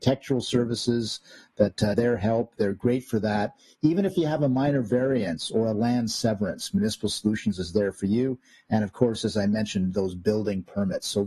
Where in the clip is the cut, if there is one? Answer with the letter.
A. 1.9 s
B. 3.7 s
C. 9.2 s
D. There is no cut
A